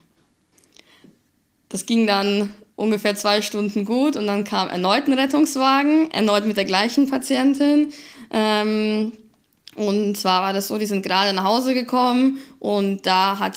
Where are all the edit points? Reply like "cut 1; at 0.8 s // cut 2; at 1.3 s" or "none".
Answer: none